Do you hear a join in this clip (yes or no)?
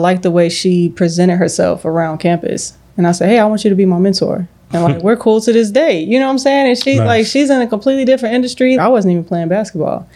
yes